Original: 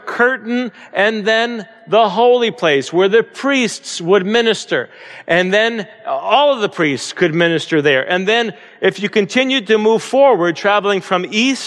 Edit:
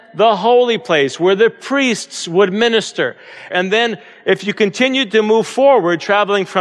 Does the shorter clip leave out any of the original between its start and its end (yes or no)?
yes